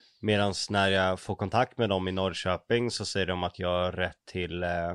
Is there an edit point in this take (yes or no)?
no